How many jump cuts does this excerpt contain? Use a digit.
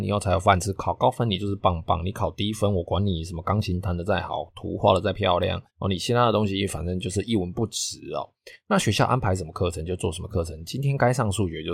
1